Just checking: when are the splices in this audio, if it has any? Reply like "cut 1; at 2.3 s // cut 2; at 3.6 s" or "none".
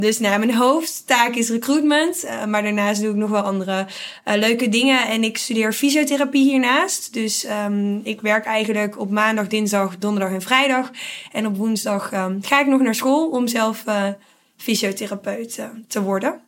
none